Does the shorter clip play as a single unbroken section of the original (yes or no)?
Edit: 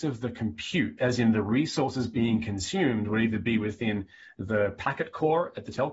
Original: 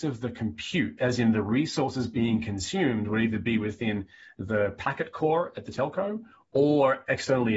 yes